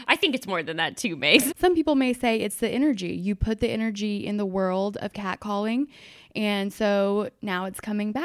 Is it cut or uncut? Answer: cut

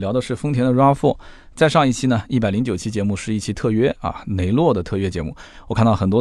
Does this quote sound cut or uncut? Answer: uncut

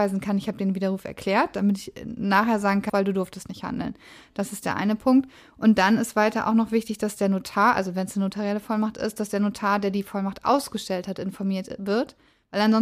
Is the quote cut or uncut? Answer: cut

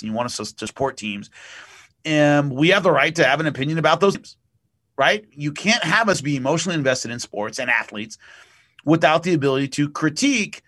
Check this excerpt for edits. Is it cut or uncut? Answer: uncut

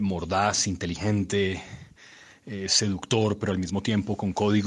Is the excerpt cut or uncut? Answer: uncut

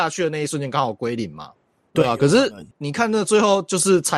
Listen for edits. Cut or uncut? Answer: cut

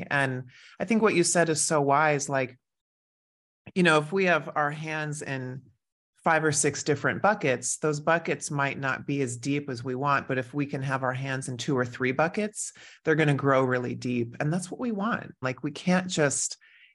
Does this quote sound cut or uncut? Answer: cut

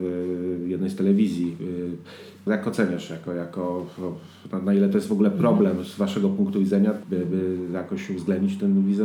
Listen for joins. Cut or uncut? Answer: cut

